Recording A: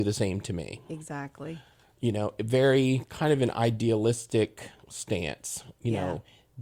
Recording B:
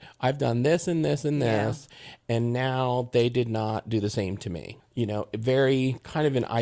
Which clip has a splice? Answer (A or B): B